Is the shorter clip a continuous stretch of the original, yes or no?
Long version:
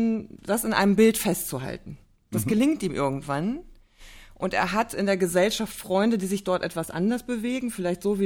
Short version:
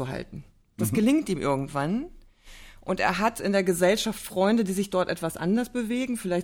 yes